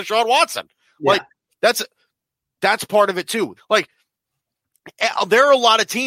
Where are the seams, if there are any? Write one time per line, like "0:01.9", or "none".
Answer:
0:03.6